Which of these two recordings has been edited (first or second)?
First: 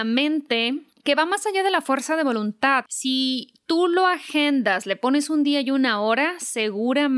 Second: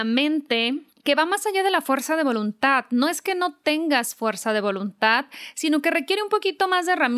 first